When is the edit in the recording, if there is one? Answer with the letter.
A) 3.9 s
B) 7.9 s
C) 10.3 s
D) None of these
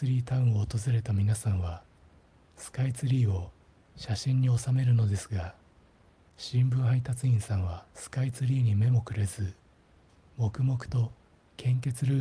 B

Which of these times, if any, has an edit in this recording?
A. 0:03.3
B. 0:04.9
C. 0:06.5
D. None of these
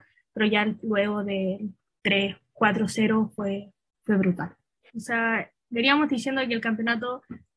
B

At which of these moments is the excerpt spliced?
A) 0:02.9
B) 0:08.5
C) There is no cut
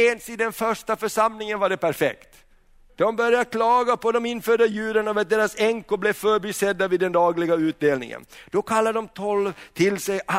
A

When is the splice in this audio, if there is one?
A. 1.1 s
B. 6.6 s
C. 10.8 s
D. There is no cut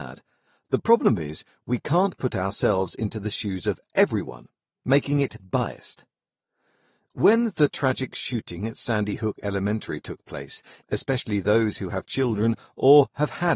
C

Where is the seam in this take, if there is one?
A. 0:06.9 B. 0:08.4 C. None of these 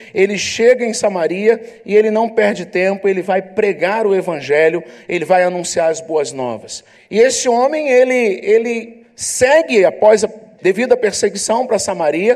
A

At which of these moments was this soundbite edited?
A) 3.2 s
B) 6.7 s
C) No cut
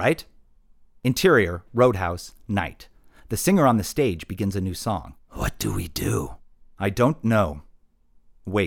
A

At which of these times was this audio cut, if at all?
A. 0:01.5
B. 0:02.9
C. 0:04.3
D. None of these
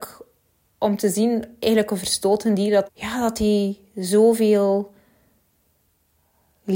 B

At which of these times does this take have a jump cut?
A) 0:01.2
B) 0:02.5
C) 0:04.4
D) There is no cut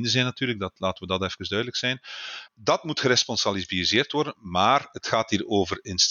B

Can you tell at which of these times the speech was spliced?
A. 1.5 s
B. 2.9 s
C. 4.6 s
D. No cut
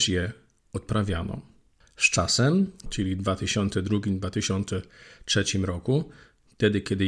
B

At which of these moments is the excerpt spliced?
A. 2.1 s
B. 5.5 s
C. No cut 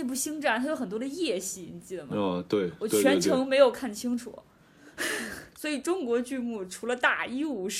B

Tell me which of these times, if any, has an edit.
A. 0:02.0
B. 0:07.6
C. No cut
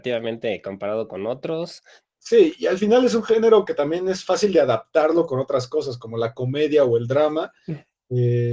A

